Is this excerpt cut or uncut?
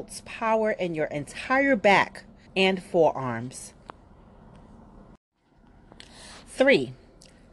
cut